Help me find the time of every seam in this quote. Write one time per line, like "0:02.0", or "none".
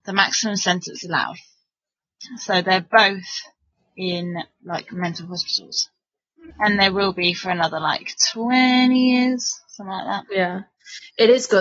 0:06.5